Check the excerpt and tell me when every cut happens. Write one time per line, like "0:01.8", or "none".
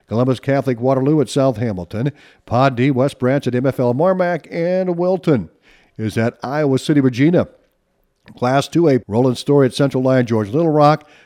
0:09.0